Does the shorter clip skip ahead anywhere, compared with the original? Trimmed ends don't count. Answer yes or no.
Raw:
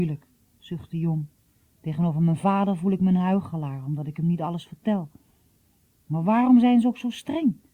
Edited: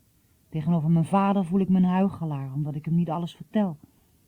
no